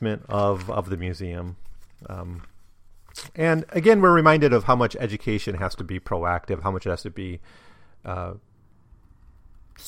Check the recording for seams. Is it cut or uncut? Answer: uncut